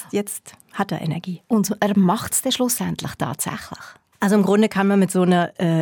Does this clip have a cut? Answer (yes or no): no